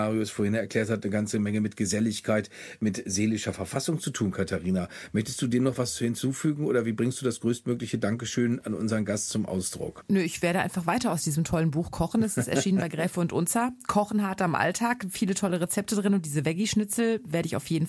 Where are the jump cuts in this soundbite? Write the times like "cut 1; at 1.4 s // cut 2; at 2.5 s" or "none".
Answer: none